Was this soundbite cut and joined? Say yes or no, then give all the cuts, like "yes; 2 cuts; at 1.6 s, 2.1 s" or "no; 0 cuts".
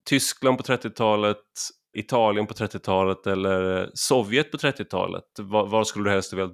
yes; 1 cut; at 1.9 s